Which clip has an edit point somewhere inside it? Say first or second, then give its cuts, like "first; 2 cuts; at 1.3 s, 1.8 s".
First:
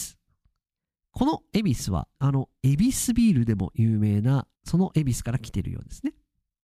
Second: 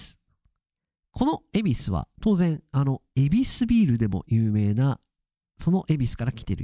first; 2 cuts; at 2.2 s, 4.6 s